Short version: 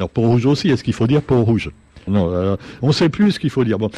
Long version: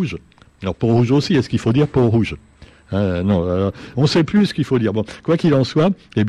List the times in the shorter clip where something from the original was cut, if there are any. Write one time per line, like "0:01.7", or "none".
0:02.1